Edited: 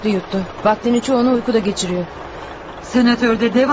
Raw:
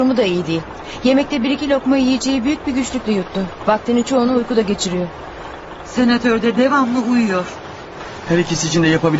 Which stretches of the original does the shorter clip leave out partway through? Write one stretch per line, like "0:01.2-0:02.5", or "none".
none